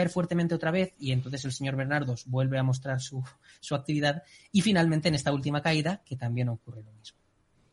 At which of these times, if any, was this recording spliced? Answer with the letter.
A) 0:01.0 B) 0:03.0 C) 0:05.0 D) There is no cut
D